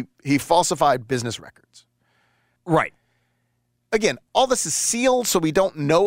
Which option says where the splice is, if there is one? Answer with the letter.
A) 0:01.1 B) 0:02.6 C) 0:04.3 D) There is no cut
B